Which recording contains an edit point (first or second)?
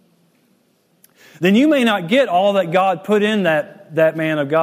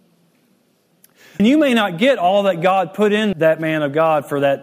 second